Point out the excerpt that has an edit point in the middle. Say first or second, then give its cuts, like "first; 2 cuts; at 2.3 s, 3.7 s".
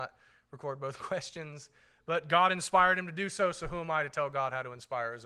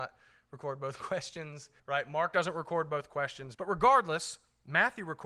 second; 2 cuts; at 1.8 s, 3.5 s